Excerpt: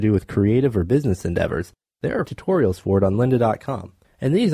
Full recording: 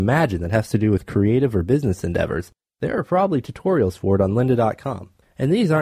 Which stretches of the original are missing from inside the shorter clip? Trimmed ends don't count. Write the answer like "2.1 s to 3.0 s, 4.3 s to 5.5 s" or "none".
3.0 s to 3.4 s